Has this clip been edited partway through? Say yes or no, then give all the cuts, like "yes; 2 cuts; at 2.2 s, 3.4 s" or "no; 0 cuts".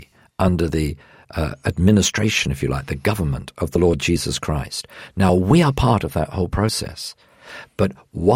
no; 0 cuts